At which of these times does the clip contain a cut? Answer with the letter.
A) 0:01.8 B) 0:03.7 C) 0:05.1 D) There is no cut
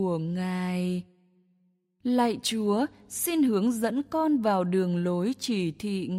D